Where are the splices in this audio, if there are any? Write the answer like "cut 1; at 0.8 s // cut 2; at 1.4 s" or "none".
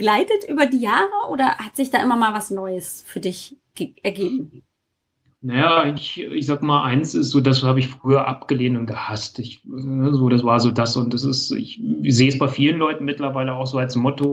none